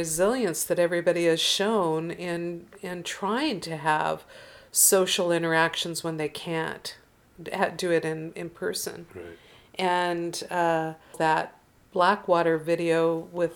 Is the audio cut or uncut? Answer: cut